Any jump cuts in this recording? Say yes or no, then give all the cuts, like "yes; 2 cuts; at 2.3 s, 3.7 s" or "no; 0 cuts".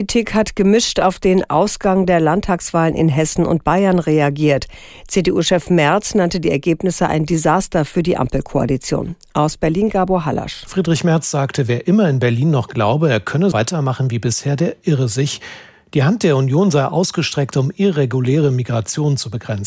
yes; 1 cut; at 13.5 s